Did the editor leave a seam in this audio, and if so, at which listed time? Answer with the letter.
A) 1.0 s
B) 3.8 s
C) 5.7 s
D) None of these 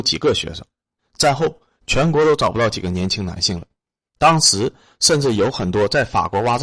A